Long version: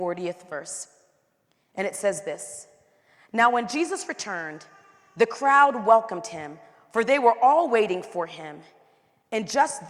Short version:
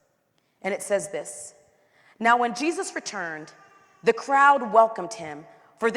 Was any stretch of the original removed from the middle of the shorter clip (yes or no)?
no